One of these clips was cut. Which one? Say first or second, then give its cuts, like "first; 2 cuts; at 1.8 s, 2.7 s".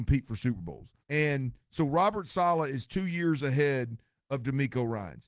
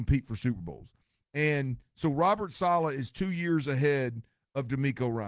first; 1 cut; at 1.0 s